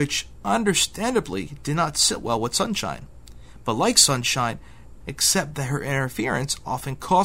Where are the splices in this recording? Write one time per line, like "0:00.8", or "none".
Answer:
0:05.0